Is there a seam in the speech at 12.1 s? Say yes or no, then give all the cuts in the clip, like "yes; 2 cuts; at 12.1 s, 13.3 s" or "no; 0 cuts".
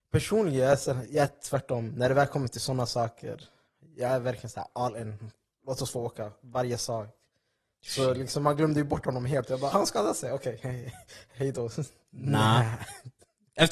yes; 2 cuts; at 9.7 s, 12.1 s